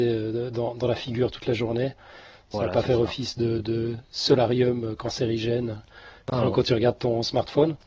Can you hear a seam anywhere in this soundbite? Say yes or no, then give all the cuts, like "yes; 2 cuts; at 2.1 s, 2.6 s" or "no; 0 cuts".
no; 0 cuts